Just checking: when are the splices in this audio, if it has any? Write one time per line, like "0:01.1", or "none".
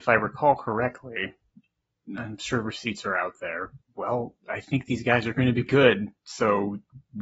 0:03.8
0:05.7